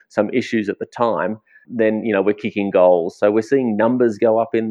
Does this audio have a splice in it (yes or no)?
yes